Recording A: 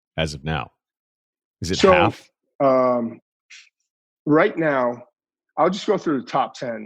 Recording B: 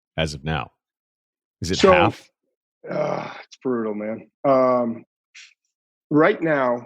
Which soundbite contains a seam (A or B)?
A